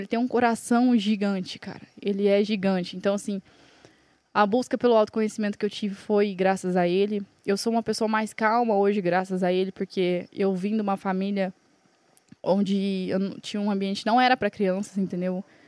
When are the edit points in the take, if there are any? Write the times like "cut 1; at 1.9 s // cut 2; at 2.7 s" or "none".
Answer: none